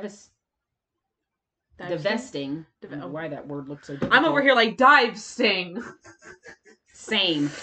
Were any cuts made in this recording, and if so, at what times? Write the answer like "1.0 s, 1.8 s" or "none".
none